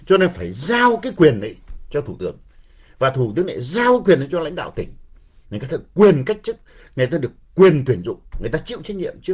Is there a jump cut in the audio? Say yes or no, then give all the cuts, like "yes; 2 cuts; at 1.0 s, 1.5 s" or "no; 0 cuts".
no; 0 cuts